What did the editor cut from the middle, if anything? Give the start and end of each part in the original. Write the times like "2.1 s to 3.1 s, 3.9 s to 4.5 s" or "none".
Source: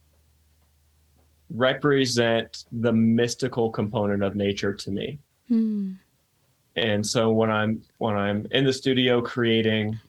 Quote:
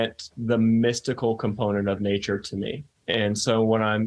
5.3 s to 6.7 s